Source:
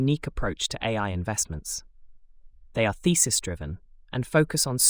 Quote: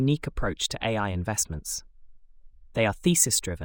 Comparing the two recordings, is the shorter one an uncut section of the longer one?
yes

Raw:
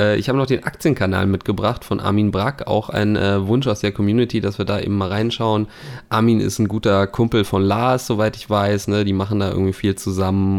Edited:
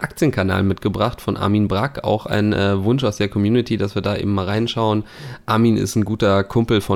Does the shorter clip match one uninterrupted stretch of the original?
yes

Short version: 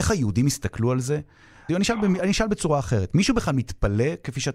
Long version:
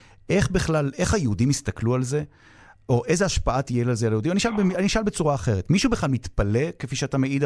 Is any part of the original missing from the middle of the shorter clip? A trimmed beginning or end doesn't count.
yes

